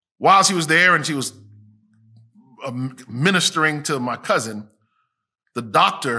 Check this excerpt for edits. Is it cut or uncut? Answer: uncut